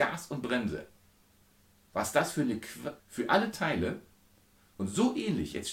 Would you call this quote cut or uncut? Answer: cut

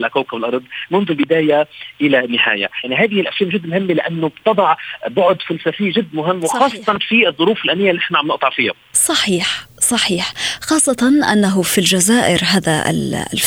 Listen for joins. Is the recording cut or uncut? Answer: cut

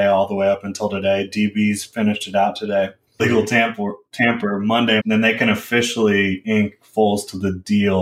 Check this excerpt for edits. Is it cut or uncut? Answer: cut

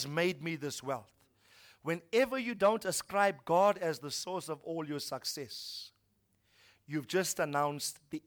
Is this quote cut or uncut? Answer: uncut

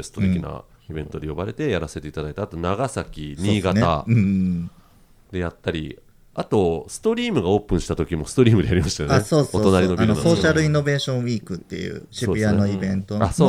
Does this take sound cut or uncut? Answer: uncut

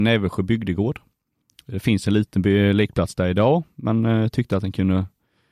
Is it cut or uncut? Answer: uncut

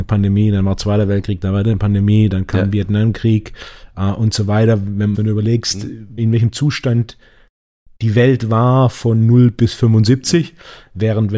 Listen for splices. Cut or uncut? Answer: cut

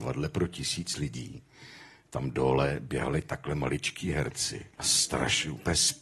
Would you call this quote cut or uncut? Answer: cut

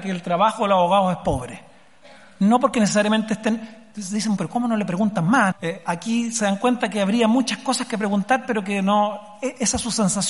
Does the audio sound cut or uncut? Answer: cut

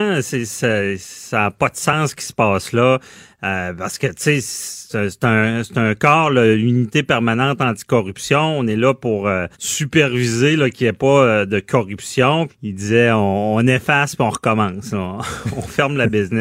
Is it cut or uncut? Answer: cut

